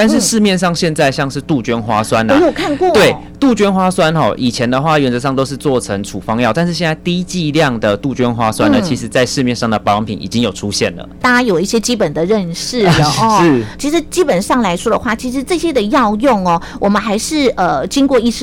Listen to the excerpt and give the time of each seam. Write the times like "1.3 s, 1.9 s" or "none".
11.2 s